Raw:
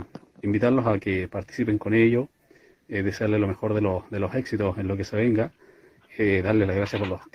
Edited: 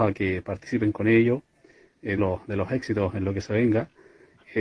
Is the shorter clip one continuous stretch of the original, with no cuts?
no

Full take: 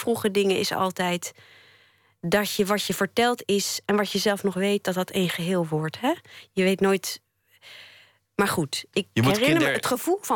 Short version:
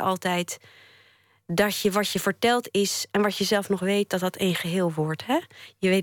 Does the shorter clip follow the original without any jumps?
yes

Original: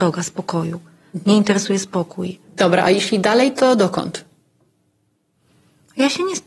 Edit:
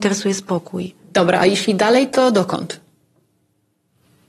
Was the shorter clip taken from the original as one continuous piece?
yes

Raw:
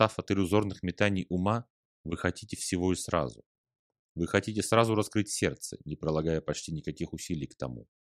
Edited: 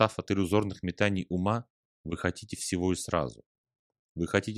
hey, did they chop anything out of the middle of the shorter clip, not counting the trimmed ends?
no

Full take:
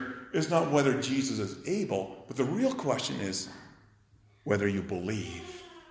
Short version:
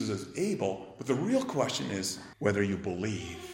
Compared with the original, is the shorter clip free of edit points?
no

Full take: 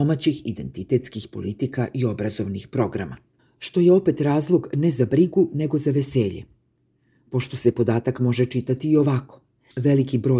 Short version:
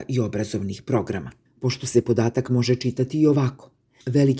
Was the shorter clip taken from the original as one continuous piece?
no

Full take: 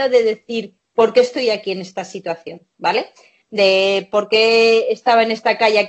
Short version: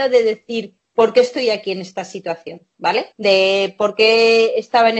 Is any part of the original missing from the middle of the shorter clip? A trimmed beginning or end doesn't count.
yes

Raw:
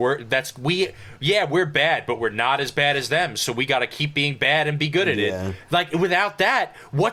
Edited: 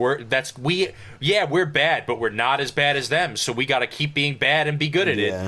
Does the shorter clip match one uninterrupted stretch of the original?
yes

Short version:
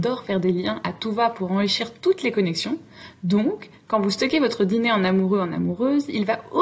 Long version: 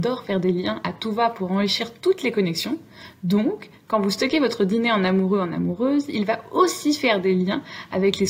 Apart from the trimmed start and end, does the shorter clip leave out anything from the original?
no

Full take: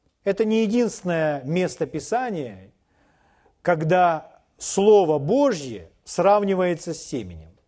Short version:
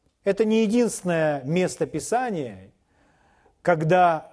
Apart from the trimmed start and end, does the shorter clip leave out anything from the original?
no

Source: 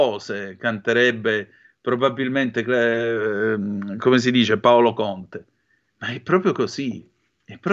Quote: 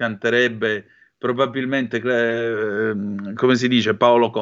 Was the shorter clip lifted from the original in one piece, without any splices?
yes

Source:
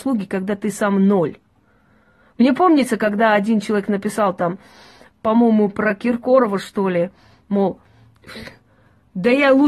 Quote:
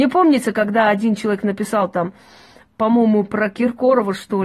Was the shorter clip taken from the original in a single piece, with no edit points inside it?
yes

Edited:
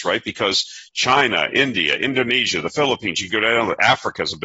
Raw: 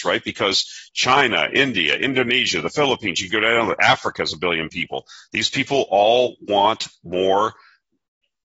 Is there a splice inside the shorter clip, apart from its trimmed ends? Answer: no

